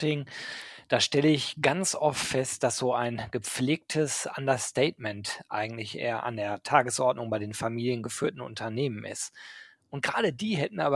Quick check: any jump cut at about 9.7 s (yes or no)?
no